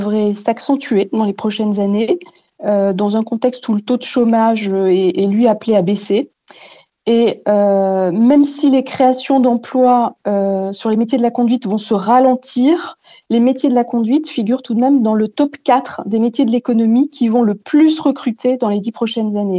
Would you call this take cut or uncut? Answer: uncut